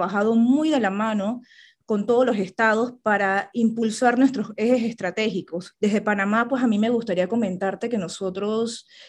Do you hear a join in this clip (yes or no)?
yes